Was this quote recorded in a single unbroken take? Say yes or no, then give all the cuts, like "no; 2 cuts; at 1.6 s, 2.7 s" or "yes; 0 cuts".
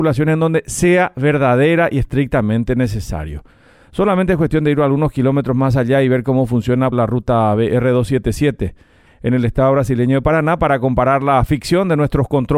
no; 1 cut; at 6.9 s